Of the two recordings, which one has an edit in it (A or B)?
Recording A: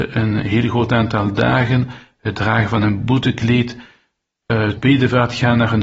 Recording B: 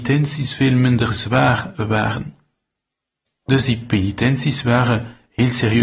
B